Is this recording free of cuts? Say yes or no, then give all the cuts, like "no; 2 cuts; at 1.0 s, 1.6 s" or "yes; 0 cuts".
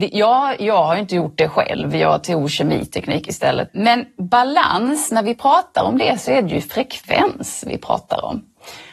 no; 1 cut; at 3.7 s